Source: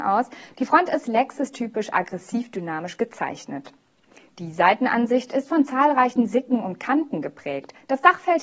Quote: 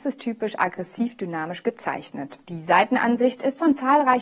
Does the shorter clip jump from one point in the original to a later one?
yes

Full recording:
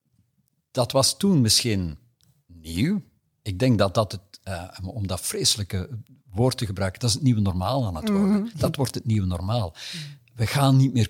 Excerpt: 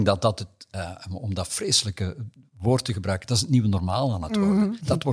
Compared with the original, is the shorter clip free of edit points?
yes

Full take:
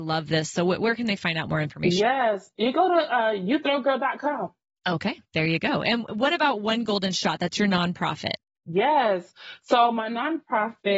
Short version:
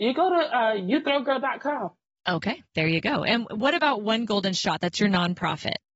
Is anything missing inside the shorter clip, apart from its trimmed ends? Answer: no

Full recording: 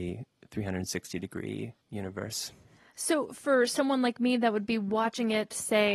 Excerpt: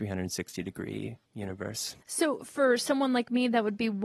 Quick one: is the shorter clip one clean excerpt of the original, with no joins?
no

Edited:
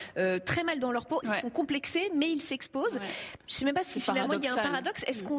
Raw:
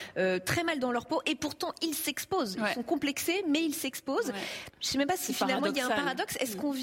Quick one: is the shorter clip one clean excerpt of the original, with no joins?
no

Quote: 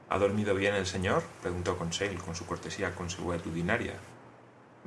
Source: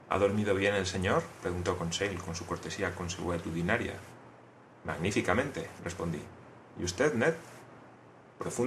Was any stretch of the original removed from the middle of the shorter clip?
no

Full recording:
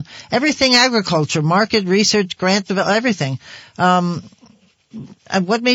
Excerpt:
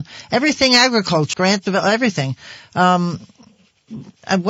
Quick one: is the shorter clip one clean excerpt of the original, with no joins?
no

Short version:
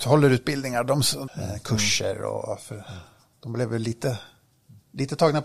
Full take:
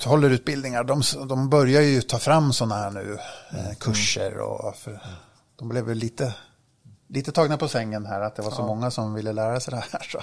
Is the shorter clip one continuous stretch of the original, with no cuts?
no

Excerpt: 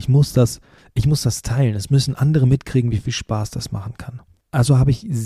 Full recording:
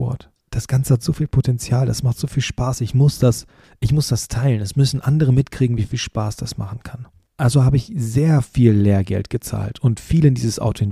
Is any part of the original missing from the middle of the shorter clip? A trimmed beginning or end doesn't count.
no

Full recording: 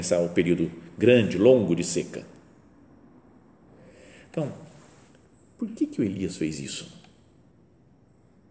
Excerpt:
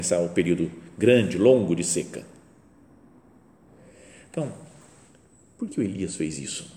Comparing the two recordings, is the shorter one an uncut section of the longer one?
no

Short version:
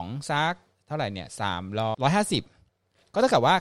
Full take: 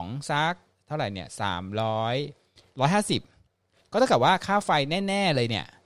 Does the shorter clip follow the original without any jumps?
no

